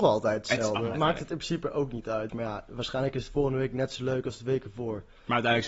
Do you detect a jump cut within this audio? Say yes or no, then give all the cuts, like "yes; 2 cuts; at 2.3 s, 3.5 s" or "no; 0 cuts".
yes; 2 cuts; at 0.9 s, 2.3 s